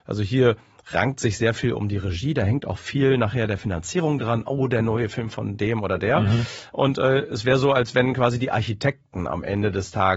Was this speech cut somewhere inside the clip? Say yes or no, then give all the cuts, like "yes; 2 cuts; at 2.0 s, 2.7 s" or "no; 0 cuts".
no; 0 cuts